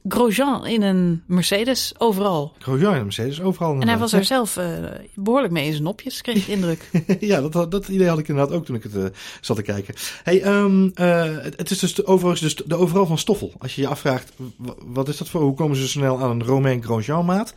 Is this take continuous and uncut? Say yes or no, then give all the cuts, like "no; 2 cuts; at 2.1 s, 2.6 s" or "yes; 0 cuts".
yes; 0 cuts